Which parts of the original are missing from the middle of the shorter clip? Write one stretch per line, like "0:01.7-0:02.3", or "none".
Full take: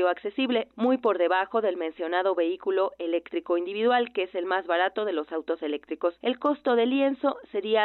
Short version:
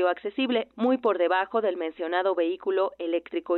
none